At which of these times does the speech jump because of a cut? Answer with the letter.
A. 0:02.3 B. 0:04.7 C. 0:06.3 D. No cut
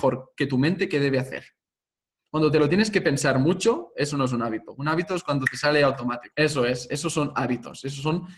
C